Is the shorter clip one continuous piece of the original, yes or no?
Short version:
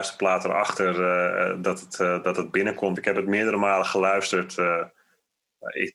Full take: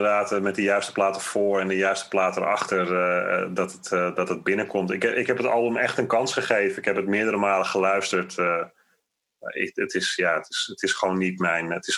no